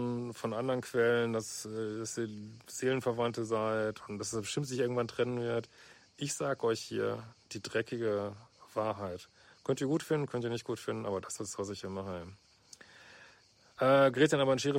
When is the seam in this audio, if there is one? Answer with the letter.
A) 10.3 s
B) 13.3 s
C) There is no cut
C